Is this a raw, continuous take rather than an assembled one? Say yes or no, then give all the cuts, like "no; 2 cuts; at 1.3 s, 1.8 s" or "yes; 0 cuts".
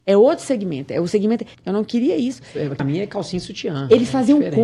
no; 2 cuts; at 1.5 s, 2.8 s